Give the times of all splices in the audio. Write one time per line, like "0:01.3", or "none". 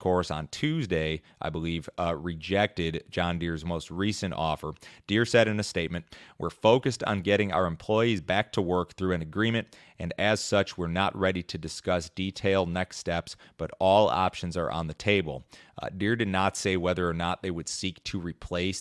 none